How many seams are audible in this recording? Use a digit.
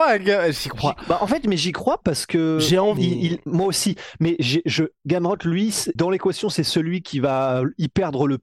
2